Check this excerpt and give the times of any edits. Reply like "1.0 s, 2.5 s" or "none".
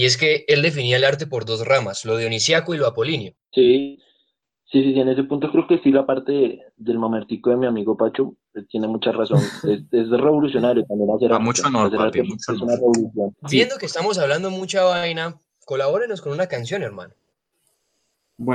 3.4 s, 13.3 s